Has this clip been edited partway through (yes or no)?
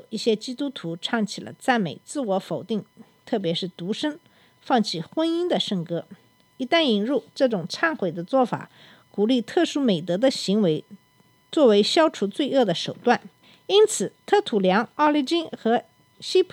no